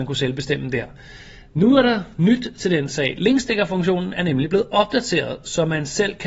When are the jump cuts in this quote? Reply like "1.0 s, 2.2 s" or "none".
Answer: none